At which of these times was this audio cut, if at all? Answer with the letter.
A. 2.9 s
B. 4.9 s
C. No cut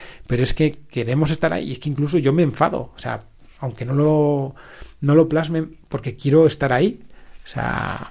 C